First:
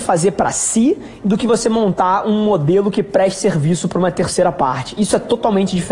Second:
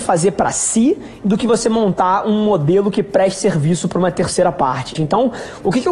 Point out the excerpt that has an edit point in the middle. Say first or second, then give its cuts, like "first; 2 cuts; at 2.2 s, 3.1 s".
second; 1 cut; at 5.0 s